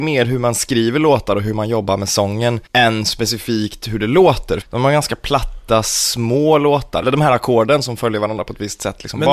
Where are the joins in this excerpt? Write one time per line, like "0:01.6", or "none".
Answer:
0:02.7
0:04.6
0:07.0